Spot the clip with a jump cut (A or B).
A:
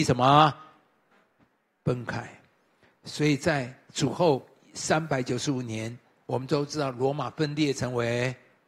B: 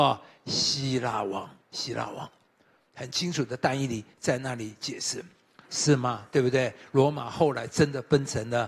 B